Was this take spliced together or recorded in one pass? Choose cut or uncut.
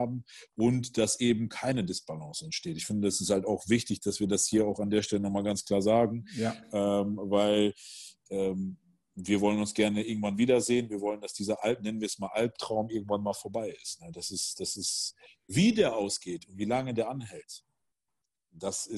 uncut